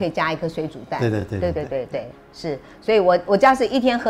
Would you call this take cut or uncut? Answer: uncut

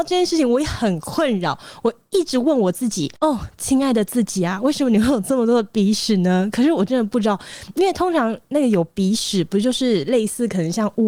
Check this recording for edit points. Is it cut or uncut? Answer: cut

